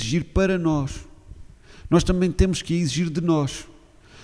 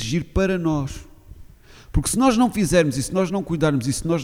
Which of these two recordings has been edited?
second; 1 cut; at 1.7 s

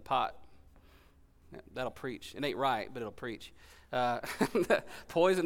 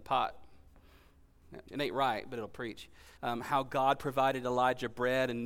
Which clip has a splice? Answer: second; 2 cuts; at 1.7 s, 3.2 s

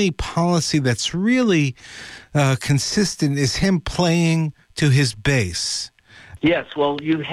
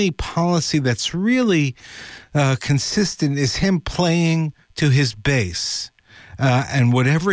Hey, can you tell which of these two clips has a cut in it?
first; 1 cut; at 6.4 s

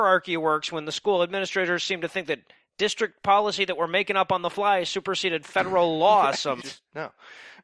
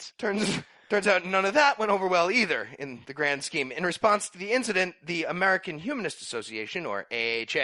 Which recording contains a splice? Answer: first; 1 cut; at 6.6 s

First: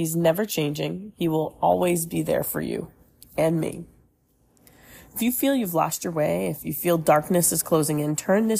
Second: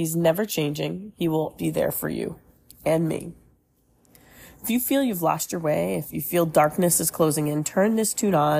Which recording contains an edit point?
second; 1 cut; at 1.6 s

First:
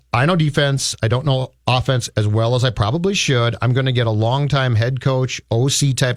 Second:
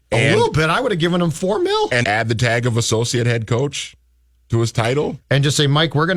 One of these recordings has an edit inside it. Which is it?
second; 2 cuts; at 2.0 s, 5.2 s

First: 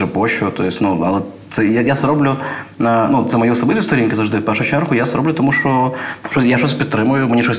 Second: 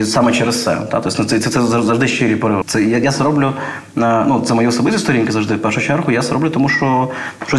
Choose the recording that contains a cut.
second; 1 cut; at 2.6 s

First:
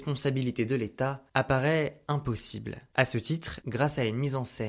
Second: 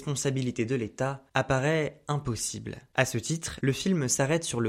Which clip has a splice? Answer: first; 1 cut; at 3.6 s

